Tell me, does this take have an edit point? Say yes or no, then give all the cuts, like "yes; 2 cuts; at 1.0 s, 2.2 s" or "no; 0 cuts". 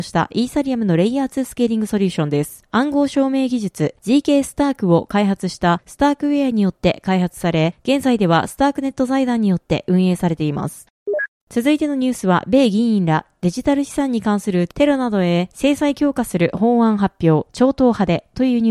no; 0 cuts